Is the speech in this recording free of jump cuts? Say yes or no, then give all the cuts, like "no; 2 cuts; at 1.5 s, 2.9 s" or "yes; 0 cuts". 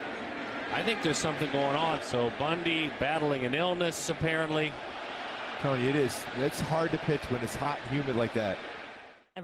no; 1 cut; at 2.0 s